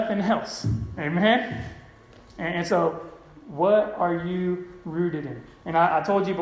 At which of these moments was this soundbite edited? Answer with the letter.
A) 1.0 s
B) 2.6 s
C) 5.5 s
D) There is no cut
D